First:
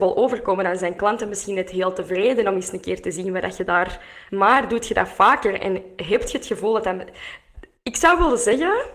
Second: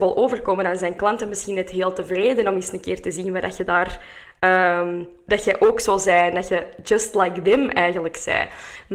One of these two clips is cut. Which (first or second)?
first